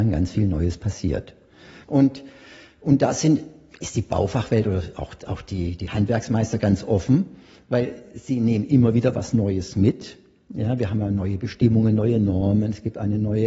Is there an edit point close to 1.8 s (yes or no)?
yes